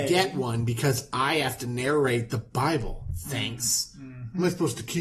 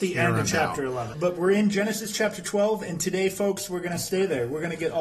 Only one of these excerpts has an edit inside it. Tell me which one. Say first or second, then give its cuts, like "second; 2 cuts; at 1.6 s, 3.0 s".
second; 1 cut; at 1.1 s